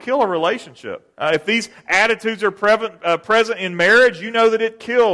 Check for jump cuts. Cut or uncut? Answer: cut